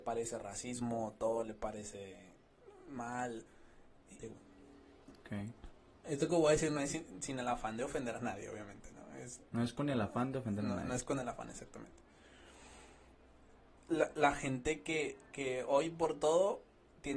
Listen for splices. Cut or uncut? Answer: cut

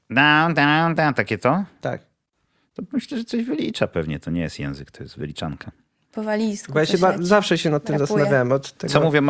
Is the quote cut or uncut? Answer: uncut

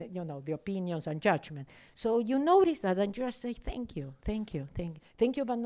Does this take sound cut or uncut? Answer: uncut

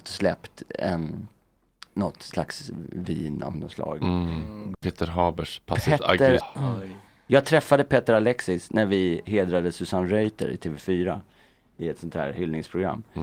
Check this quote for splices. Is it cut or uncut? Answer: cut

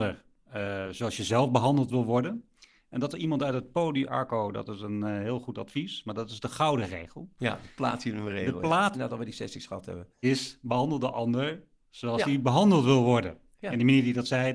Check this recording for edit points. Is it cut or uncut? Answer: cut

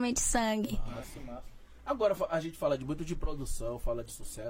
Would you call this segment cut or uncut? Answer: uncut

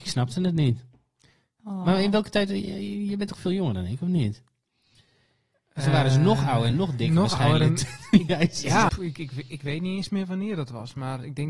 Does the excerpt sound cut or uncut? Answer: cut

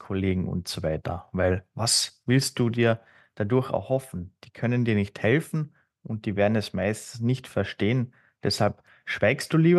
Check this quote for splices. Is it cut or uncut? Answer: uncut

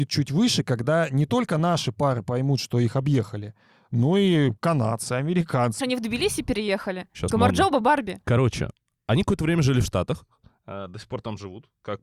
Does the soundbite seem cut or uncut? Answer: cut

